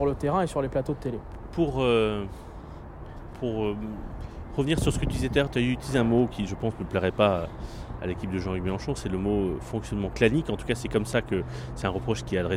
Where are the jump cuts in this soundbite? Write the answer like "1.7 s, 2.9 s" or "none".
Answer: 3.3 s